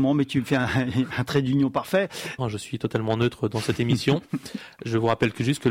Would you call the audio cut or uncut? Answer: cut